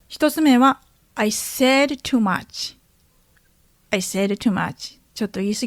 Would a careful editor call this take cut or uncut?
uncut